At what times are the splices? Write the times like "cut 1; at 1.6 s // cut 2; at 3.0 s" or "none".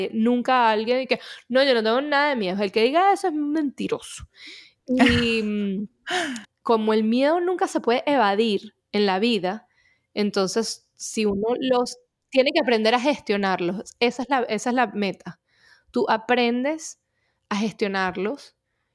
cut 1; at 6.4 s